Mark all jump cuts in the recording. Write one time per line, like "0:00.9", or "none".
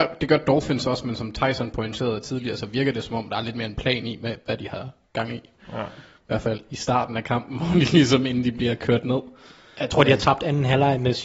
none